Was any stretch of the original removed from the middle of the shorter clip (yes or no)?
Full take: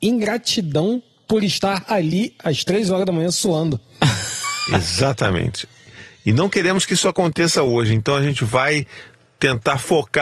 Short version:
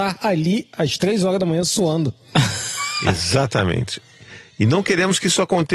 no